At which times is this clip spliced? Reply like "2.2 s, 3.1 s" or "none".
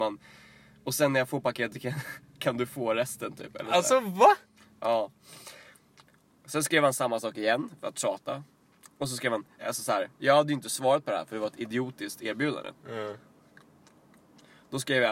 9.6 s, 12.8 s